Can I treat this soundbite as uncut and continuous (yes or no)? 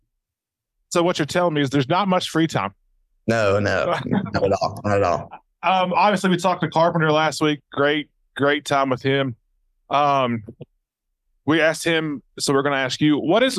yes